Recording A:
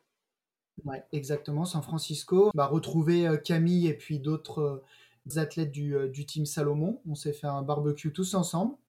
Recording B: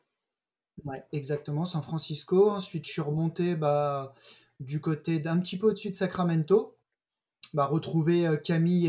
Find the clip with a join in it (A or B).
A